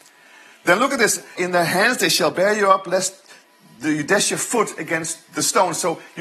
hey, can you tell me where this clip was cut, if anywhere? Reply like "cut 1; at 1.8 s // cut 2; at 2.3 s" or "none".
cut 1; at 1.4 s